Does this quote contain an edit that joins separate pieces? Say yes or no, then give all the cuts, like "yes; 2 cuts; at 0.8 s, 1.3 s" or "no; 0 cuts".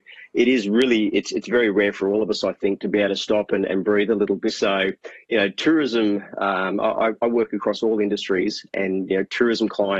yes; 1 cut; at 4.5 s